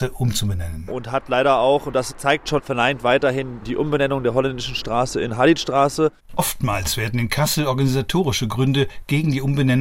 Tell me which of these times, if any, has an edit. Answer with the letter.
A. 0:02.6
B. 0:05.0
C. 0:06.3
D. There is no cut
A